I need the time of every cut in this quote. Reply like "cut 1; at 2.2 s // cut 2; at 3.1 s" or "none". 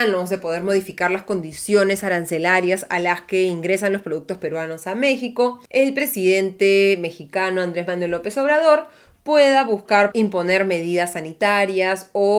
cut 1; at 5.7 s // cut 2; at 10.1 s

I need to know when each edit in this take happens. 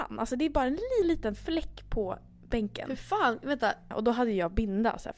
cut 1; at 1.0 s // cut 2; at 3.9 s

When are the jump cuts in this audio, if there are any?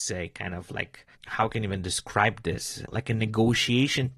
cut 1; at 1.1 s // cut 2; at 2.9 s

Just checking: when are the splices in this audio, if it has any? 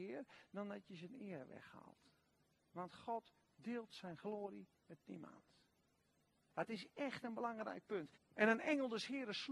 cut 1; at 6.5 s // cut 2; at 8.2 s

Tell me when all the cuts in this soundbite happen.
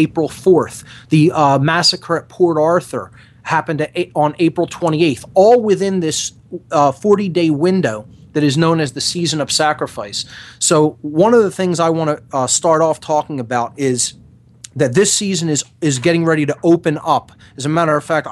cut 1; at 1.1 s

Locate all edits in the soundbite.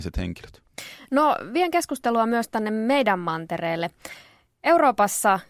none

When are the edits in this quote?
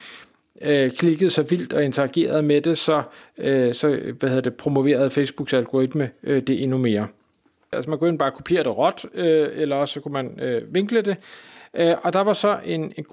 cut 1; at 7.7 s

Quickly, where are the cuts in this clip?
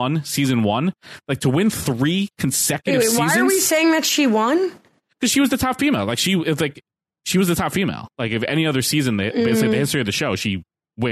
cut 1; at 8.1 s

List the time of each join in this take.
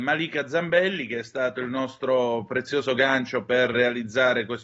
cut 1; at 3.7 s

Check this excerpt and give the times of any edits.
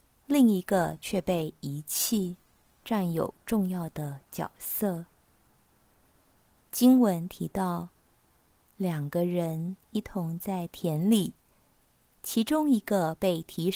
cut 1; at 2.8 s

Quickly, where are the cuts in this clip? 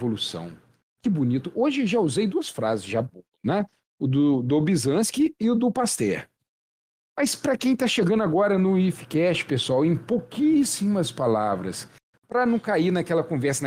cut 1; at 12.1 s

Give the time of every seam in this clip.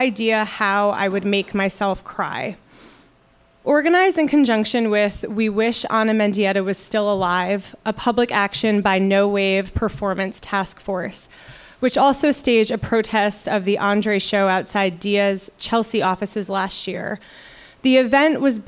none

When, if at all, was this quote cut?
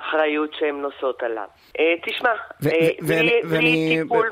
cut 1; at 1.7 s

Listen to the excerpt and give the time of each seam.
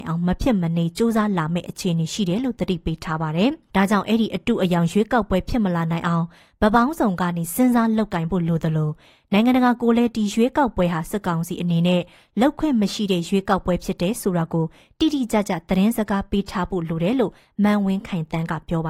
cut 1; at 3.7 s

